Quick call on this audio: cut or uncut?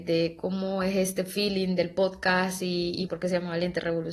cut